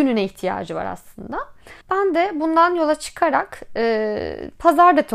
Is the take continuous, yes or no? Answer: no